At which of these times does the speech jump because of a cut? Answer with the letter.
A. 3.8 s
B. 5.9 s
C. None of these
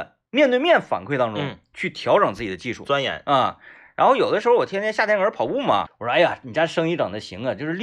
B